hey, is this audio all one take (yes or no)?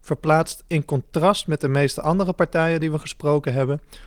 yes